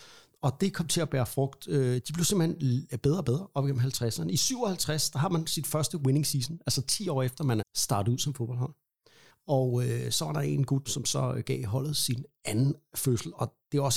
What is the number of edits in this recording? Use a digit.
3